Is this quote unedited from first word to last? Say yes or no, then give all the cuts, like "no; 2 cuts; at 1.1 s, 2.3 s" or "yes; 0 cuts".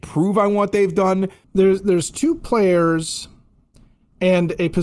yes; 0 cuts